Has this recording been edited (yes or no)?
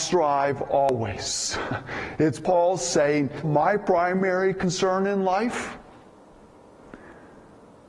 yes